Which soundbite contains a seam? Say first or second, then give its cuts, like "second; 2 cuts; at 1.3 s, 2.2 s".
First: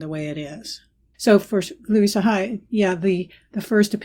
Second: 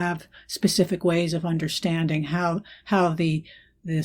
first; 1 cut; at 1.1 s